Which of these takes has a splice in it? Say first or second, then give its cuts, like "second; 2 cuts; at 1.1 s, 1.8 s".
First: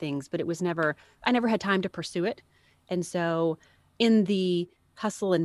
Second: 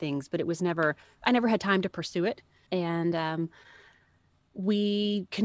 second; 1 cut; at 2.7 s